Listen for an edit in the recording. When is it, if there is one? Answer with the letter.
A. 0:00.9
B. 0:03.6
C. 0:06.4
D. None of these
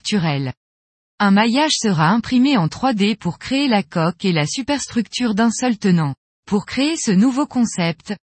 C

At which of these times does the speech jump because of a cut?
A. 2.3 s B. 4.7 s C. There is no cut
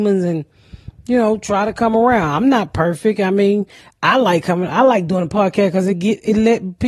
C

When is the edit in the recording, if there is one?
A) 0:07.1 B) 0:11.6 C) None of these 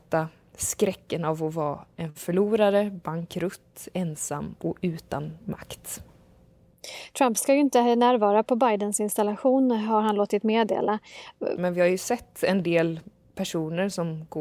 B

